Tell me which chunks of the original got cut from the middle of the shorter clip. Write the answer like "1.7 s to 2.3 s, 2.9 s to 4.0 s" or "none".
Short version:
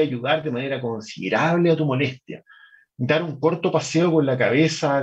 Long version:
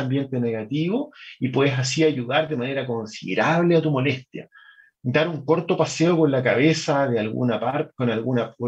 none